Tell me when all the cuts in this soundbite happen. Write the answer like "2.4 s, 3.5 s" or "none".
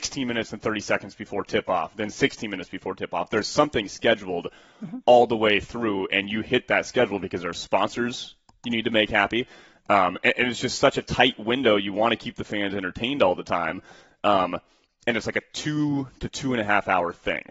none